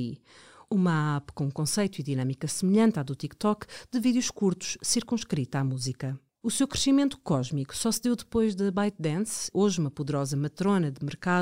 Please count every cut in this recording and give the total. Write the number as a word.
two